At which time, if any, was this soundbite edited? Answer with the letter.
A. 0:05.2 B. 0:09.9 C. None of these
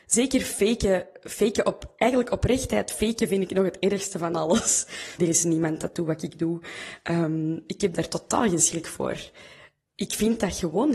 A